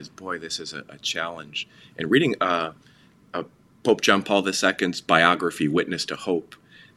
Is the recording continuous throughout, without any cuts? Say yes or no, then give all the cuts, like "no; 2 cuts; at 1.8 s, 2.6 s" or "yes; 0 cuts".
yes; 0 cuts